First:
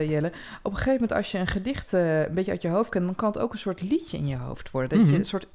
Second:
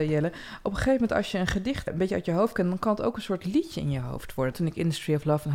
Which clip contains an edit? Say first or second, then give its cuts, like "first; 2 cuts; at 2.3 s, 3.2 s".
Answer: second; 2 cuts; at 1.9 s, 4.5 s